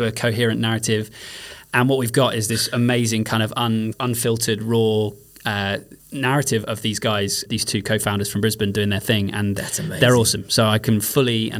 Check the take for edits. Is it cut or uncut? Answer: cut